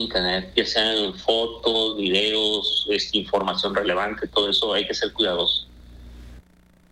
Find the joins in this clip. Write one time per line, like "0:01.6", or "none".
none